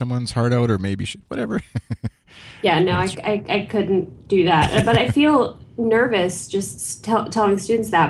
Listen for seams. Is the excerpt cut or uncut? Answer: uncut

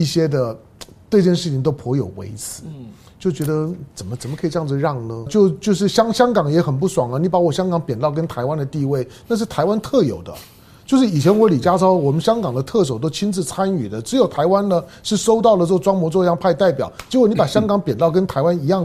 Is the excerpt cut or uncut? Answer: cut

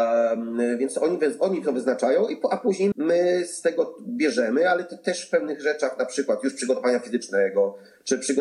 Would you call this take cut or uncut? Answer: cut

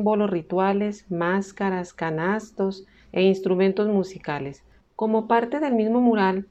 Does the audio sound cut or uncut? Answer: cut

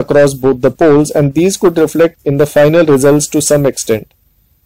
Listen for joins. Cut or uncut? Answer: cut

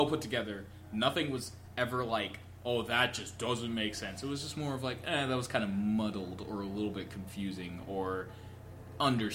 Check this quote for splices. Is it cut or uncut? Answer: uncut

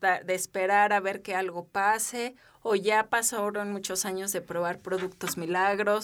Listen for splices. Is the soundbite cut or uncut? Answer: uncut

